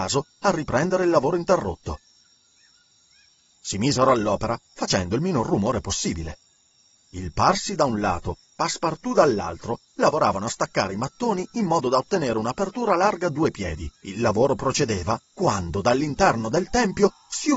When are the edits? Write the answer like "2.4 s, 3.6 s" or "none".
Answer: 3.5 s, 13.9 s, 15.3 s